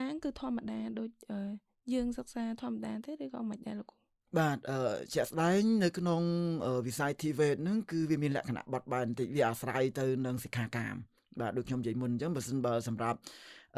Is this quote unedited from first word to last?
yes; 0 cuts

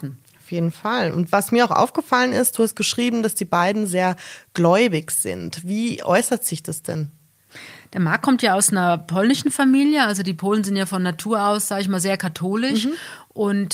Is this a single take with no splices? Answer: yes; 0 cuts

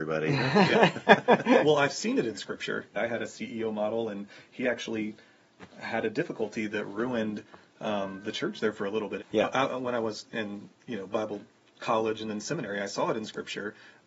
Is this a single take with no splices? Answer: no; 2 cuts; at 2.9 s, 9.2 s

